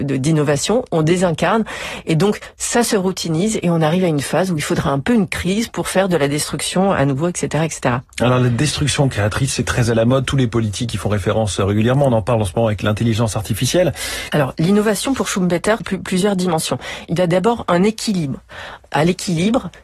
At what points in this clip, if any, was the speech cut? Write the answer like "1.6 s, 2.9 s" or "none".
14.3 s, 15.8 s, 17.1 s